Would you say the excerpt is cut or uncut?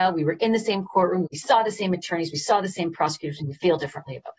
cut